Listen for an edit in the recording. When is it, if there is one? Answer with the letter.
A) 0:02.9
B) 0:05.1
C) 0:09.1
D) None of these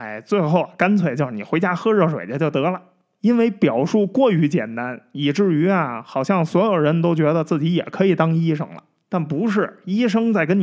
D